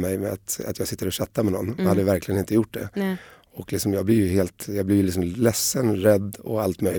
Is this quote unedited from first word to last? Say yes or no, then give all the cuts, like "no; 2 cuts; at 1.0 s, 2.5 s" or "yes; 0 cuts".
yes; 0 cuts